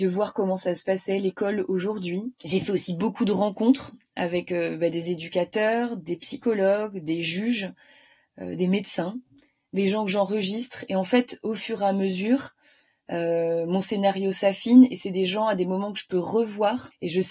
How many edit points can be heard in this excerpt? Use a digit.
1